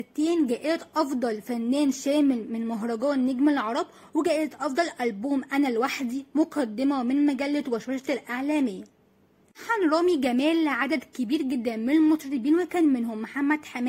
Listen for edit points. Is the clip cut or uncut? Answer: uncut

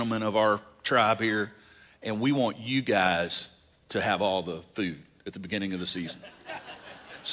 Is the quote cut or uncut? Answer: uncut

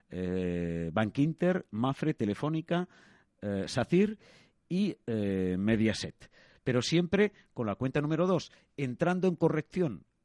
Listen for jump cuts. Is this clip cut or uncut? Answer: cut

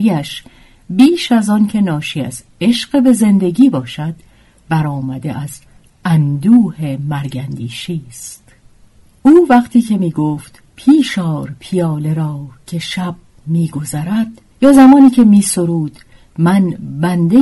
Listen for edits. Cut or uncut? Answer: cut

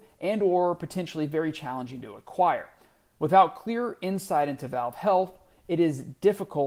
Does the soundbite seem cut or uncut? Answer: uncut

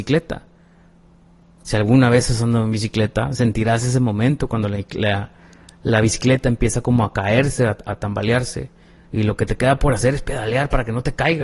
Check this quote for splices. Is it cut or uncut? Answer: uncut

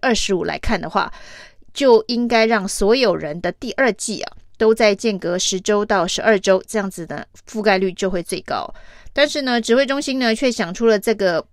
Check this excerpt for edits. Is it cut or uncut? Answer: uncut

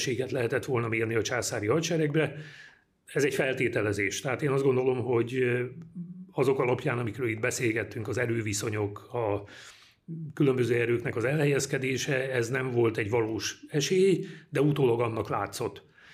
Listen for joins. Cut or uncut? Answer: uncut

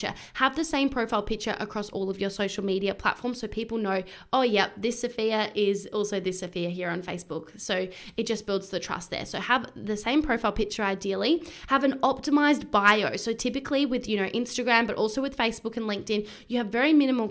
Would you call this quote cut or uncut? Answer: uncut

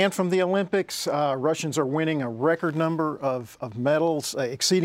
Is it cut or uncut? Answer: uncut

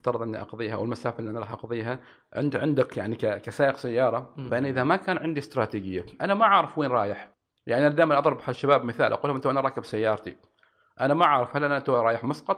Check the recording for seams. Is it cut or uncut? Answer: cut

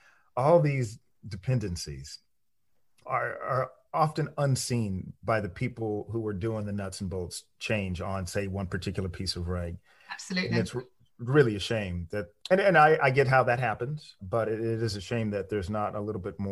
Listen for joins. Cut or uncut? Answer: uncut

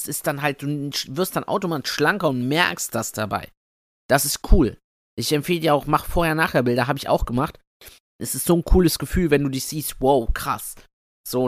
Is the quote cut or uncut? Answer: uncut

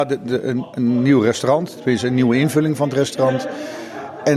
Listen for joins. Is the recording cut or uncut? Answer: uncut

